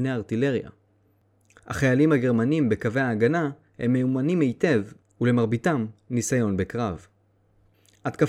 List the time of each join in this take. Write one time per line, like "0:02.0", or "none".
none